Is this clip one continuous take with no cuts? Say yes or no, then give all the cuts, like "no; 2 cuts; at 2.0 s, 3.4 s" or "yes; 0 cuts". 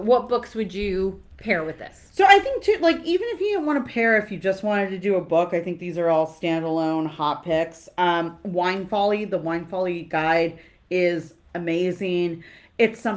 yes; 0 cuts